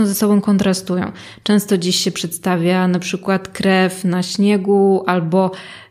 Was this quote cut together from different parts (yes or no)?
no